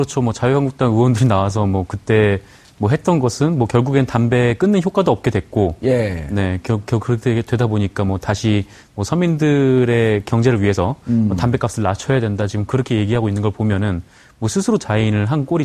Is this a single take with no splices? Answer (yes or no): yes